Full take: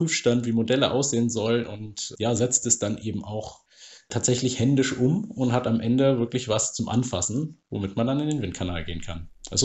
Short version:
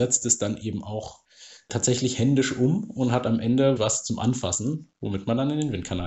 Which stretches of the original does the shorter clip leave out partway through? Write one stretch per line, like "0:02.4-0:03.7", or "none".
0:06.2-0:06.5